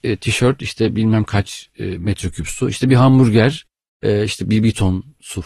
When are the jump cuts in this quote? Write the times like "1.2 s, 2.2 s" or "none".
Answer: 4.4 s